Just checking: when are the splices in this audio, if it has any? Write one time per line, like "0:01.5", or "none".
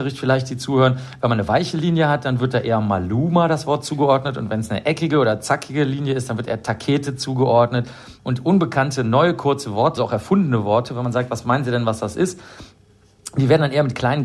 0:08.2
0:10.0